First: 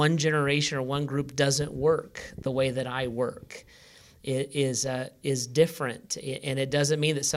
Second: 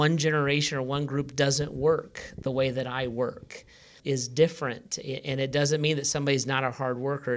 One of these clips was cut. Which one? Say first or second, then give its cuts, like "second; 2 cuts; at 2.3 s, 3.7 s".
second; 1 cut; at 4.0 s